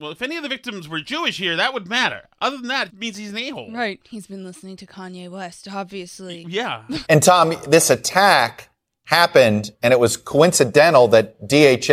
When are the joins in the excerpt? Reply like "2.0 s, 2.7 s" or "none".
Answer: 2.9 s, 7.0 s